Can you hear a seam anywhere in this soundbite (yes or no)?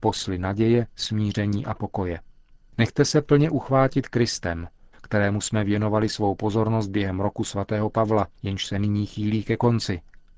yes